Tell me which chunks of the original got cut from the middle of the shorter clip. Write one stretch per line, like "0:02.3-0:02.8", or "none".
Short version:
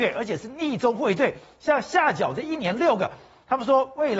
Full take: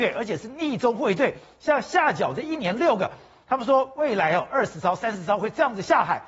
none